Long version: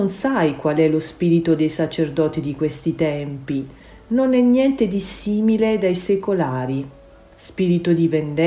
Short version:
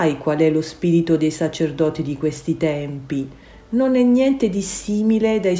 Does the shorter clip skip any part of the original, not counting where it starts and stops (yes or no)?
no